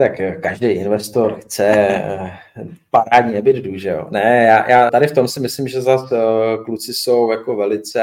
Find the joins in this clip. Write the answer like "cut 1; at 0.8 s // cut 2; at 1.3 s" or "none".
cut 1; at 4.9 s